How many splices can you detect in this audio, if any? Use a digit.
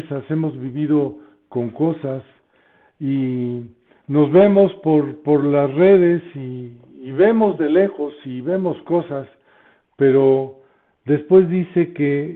0